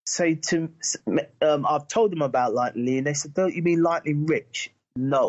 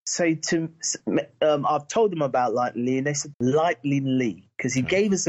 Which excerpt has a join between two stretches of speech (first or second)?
second